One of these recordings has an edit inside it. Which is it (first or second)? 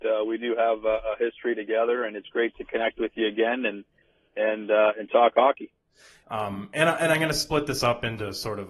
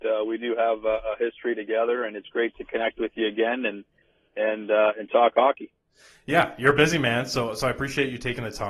first